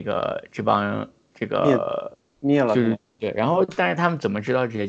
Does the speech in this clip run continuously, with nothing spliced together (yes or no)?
no